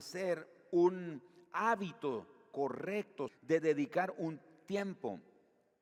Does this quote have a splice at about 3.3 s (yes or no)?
yes